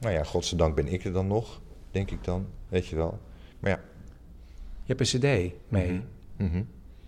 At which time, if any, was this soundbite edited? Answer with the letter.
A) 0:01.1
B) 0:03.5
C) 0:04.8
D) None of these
B